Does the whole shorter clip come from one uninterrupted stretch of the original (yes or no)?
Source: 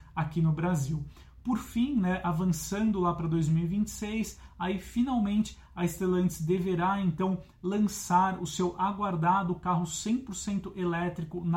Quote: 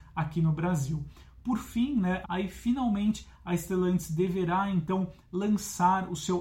no